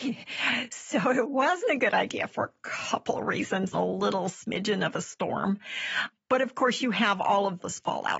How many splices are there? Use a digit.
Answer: 1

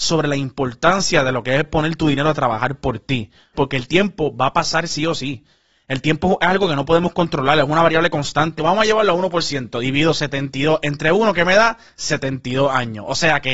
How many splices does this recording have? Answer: 2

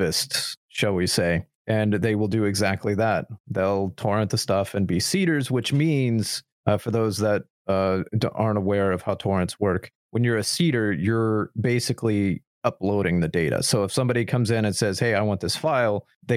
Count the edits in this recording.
0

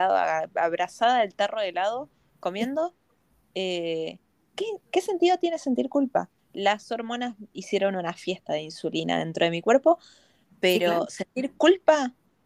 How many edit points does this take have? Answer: 2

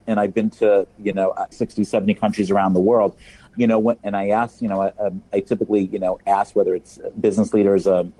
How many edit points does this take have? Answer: 2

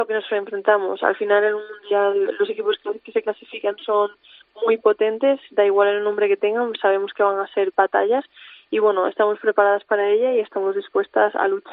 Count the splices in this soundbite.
0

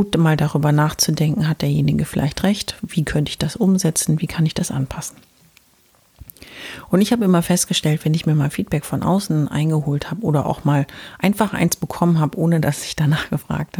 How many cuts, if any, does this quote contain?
0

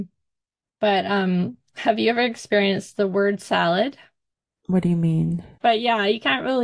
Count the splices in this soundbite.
1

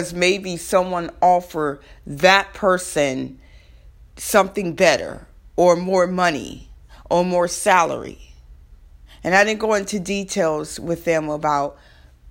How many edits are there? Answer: 0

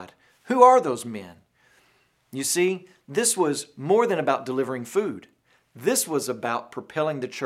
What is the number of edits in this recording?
0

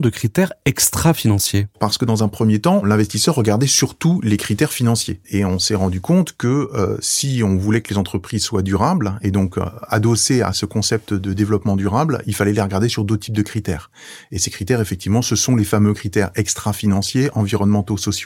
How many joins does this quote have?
0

